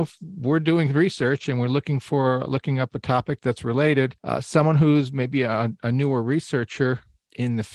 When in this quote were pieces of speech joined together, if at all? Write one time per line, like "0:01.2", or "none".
0:04.2